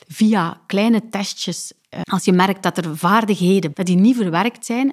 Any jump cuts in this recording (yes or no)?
yes